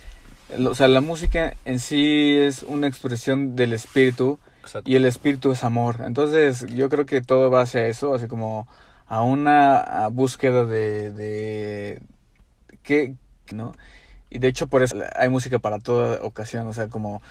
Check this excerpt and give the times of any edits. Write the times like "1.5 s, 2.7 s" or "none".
13.5 s, 14.9 s